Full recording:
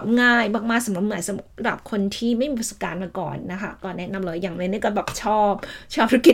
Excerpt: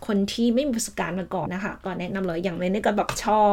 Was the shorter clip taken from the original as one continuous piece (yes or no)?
no